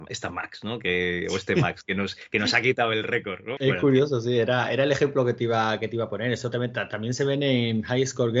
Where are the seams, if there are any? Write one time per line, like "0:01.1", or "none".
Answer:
0:03.6